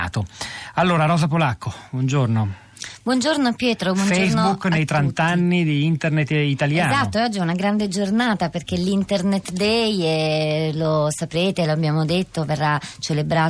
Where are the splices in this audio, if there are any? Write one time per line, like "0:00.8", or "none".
none